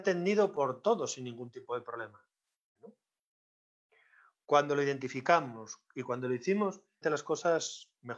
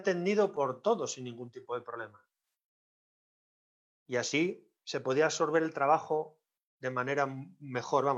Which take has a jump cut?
first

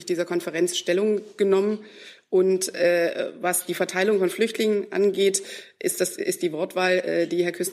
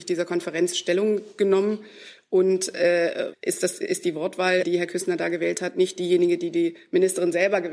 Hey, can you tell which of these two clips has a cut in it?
second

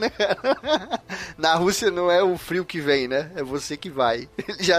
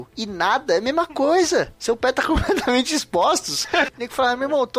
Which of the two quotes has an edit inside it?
second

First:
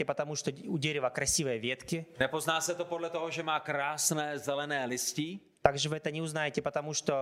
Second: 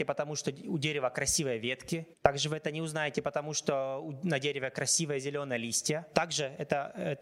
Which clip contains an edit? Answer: second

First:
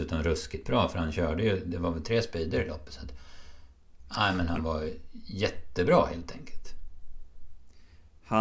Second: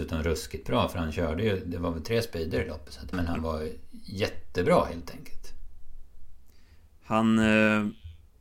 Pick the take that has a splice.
second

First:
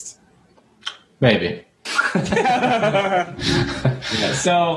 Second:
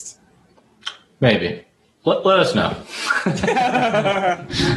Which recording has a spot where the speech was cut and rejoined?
first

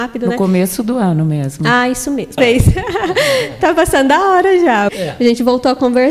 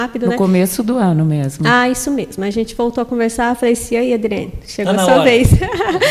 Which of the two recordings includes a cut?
first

